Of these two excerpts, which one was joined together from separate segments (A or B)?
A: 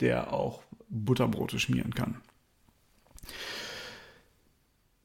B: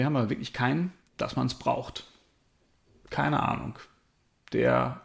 B